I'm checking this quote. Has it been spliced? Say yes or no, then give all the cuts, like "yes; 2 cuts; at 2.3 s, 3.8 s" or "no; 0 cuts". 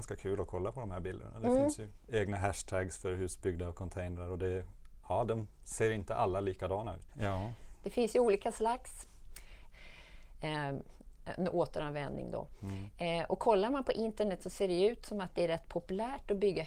yes; 2 cuts; at 7.1 s, 9.7 s